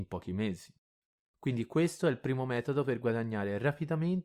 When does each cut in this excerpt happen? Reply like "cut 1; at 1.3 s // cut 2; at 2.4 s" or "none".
none